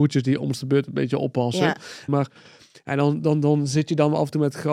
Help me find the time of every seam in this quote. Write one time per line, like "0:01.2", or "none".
0:02.1